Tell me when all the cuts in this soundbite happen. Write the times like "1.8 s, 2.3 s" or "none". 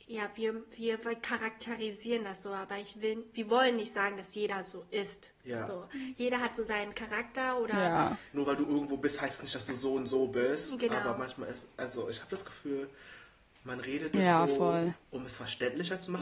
none

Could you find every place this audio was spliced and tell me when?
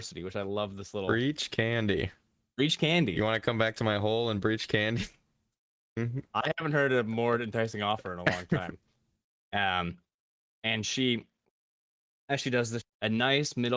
6.0 s, 9.3 s, 12.8 s

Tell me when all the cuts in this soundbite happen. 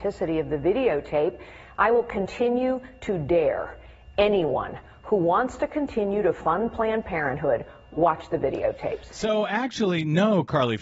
none

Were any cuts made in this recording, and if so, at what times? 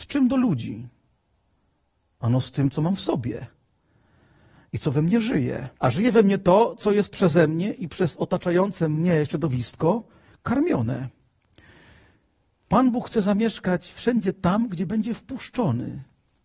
5.8 s

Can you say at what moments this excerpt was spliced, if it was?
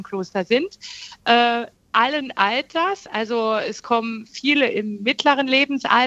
none

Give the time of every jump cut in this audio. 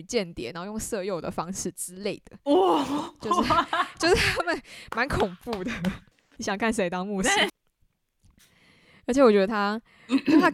6.4 s, 7.5 s

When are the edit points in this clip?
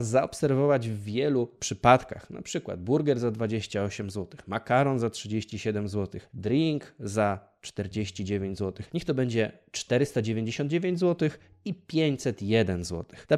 8.9 s

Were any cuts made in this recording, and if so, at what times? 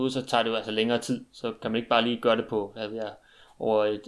none

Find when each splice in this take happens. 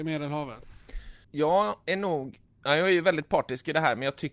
1.2 s

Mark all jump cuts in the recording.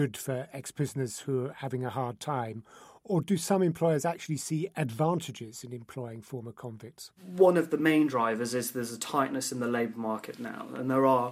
7.2 s

